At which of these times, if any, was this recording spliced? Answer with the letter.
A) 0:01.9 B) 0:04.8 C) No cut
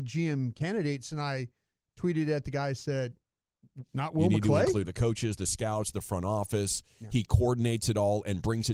B